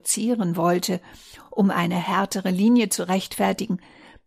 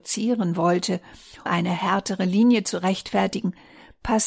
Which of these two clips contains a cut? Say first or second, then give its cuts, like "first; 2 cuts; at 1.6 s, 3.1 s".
second; 1 cut; at 1.5 s